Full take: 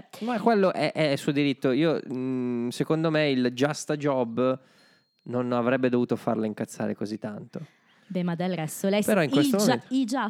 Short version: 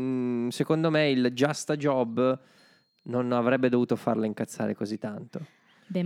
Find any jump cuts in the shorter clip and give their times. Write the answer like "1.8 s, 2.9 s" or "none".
none